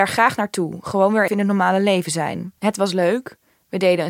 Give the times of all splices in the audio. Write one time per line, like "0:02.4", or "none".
0:01.3
0:02.6